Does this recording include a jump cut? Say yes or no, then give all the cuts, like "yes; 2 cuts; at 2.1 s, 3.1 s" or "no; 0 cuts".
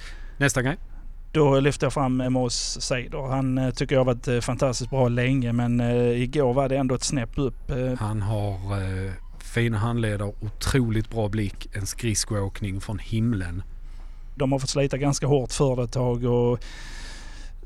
yes; 3 cuts; at 2.2 s, 7.9 s, 14.4 s